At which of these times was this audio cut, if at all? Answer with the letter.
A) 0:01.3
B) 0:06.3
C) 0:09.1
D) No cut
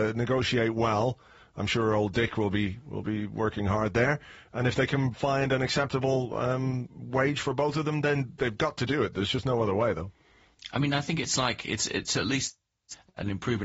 D